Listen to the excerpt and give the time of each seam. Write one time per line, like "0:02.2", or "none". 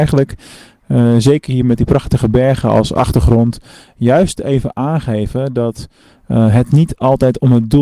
none